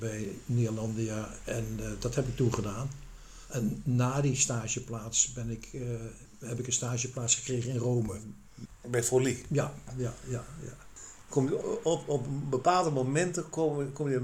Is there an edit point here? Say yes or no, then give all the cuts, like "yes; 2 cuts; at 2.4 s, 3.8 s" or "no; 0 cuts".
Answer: no; 0 cuts